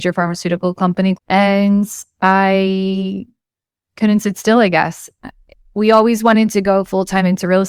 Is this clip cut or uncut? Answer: cut